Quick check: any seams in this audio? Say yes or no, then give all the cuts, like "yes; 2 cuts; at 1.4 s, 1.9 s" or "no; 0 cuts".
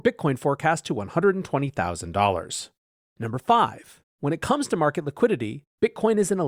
no; 0 cuts